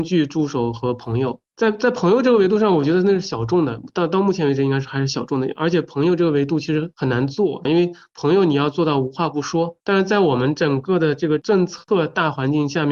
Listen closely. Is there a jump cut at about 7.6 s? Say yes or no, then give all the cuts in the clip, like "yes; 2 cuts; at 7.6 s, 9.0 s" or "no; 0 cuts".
yes; 1 cut; at 7.6 s